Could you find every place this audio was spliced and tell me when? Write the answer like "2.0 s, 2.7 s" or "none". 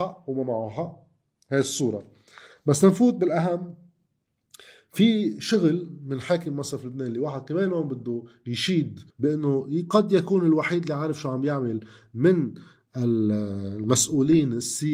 9.1 s